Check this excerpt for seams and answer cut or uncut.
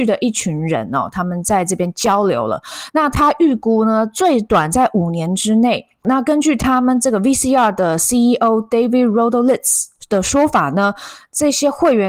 cut